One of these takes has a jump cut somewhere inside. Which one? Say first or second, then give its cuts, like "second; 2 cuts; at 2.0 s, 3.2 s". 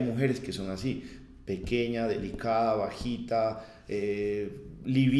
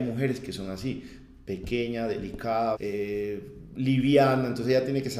second; 1 cut; at 2.7 s